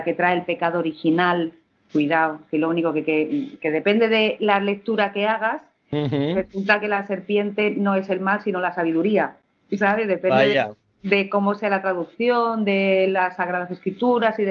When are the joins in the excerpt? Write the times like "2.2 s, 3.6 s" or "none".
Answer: none